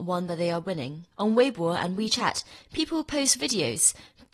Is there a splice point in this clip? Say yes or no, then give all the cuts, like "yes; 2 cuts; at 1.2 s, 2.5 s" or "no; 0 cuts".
yes; 1 cut; at 1.1 s